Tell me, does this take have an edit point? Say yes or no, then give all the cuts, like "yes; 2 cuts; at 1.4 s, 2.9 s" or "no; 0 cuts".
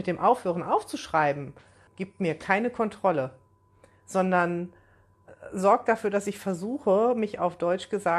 yes; 1 cut; at 1.9 s